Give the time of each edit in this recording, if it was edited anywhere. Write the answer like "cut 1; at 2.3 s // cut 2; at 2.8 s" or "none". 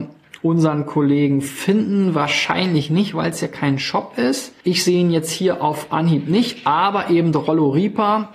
cut 1; at 4.6 s